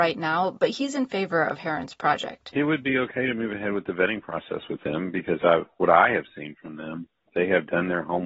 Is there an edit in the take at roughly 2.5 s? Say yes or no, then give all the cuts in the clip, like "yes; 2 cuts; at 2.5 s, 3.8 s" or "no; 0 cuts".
no; 0 cuts